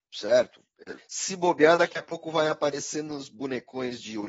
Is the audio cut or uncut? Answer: cut